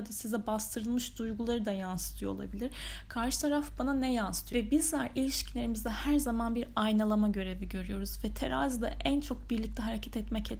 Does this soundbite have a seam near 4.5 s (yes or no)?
yes